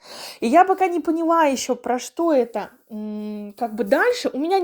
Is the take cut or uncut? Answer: uncut